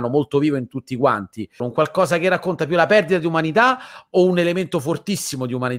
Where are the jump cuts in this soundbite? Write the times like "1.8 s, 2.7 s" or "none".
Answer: 1.6 s